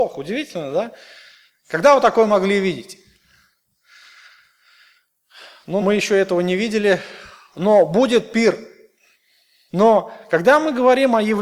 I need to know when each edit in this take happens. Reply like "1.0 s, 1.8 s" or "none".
5.8 s, 9.7 s